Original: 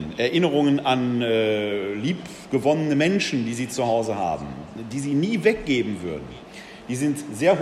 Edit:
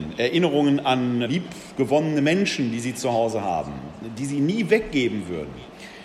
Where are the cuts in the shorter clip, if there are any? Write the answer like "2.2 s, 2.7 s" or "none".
1.2 s